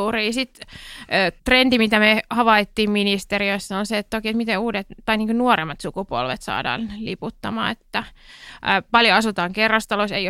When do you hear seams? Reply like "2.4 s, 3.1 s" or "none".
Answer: 1.4 s

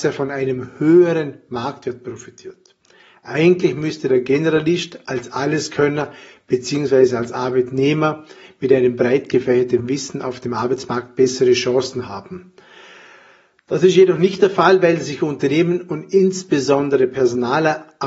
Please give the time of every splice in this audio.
none

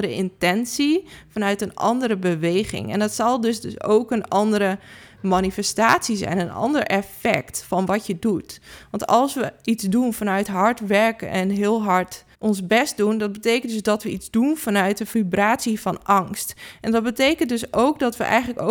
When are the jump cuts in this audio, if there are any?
12.3 s

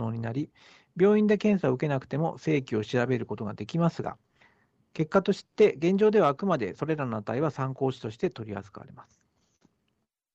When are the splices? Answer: none

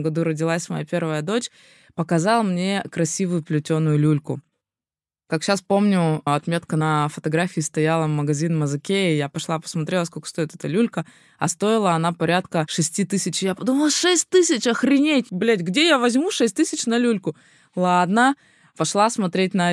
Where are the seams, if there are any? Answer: none

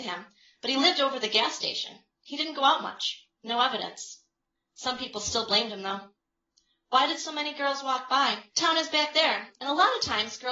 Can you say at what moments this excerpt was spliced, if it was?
8.5 s

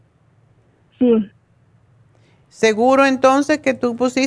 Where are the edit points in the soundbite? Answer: none

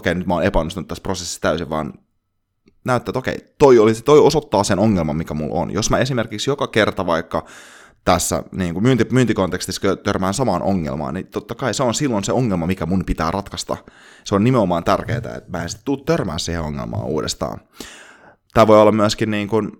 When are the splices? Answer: none

